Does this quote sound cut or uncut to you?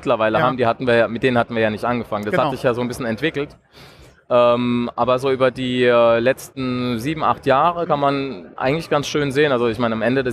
uncut